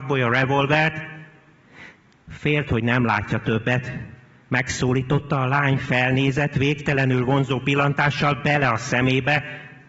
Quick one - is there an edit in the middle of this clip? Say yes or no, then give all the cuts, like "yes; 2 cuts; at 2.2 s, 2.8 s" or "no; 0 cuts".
no; 0 cuts